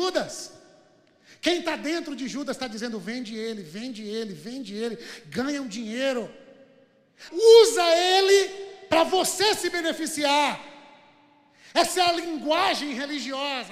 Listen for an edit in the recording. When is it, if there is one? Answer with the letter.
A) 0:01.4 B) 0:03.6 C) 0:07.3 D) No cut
C